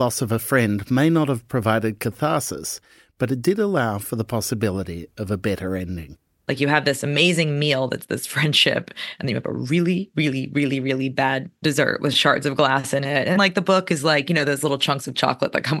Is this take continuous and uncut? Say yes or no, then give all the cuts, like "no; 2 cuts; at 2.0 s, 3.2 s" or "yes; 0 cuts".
no; 1 cut; at 13.4 s